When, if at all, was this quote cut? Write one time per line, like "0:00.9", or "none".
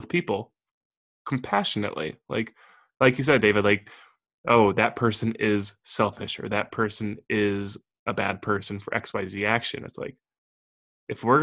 none